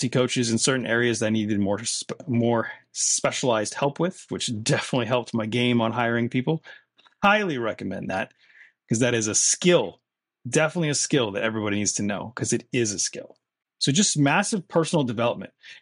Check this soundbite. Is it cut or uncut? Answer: cut